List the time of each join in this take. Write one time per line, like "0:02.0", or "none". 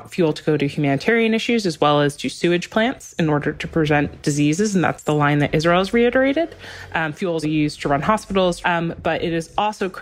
0:07.4
0:08.6